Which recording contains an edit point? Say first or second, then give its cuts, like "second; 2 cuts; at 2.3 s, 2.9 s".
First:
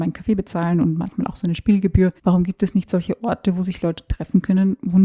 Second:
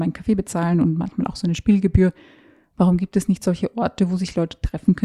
first; 1 cut; at 2.2 s